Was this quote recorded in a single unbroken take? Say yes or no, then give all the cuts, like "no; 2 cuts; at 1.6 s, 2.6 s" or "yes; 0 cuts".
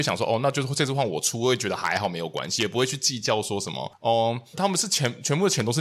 no; 1 cut; at 4.5 s